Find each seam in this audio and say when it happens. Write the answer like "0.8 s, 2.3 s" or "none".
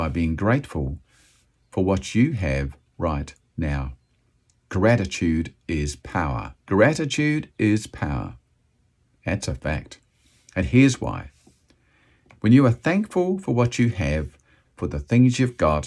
6.6 s, 14.6 s

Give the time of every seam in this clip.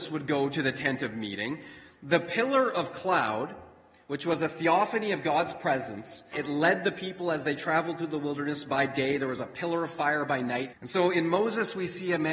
6.3 s, 10.7 s

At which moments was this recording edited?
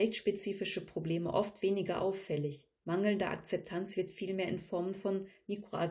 2.8 s

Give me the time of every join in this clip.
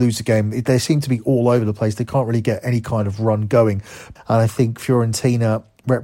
4.2 s

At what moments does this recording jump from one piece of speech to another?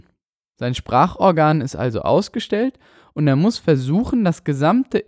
none

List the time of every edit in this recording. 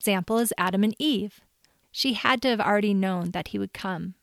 1.8 s

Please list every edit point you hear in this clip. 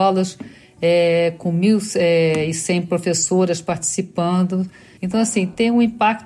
5.0 s

